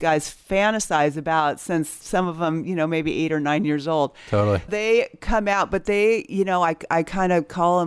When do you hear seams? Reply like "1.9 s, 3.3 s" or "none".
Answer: 4.7 s